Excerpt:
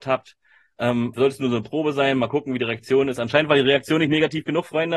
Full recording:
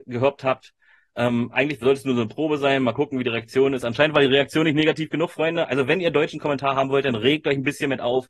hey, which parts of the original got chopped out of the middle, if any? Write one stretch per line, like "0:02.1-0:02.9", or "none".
0:01.5-0:01.8